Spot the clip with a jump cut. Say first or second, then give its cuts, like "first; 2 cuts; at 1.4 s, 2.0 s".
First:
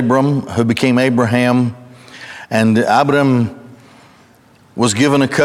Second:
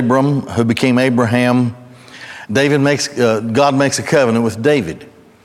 second; 1 cut; at 2.5 s